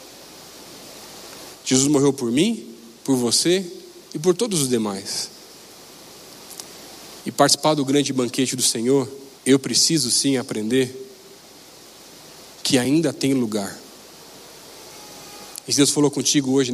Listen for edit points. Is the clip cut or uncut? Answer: cut